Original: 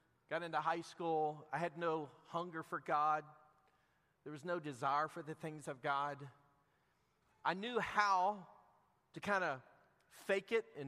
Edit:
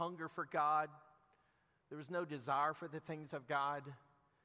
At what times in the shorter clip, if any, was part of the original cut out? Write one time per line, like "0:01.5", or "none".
none